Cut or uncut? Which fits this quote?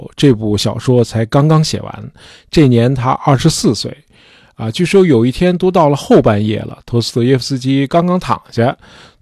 uncut